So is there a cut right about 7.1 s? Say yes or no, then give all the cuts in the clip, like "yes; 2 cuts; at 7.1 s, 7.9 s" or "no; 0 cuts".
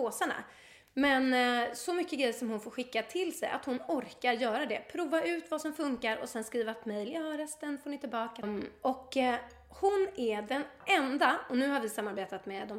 no; 1 cut; at 8.4 s